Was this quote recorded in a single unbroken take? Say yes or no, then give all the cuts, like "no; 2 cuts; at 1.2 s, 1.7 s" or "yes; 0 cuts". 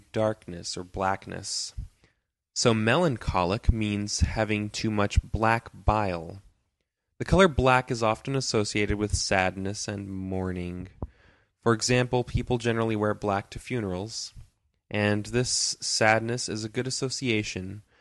yes; 0 cuts